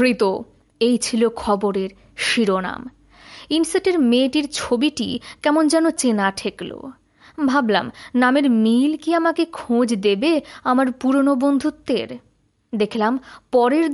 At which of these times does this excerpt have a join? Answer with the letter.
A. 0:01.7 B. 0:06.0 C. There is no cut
B